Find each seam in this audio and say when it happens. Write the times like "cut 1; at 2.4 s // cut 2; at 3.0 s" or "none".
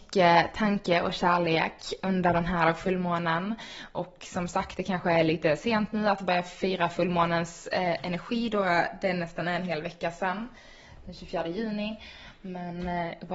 none